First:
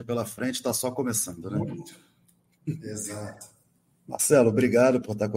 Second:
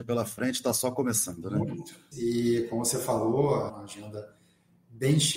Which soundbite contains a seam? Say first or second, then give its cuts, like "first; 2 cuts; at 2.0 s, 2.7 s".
second; 2 cuts; at 2.1 s, 3.7 s